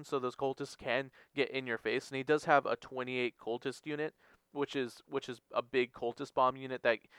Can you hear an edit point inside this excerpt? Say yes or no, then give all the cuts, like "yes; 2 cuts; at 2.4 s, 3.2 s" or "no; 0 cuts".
no; 0 cuts